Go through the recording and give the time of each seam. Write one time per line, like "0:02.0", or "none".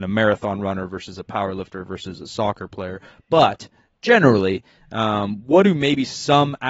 none